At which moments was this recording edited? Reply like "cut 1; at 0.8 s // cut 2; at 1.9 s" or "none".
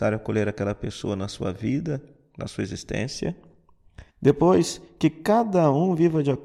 cut 1; at 4.1 s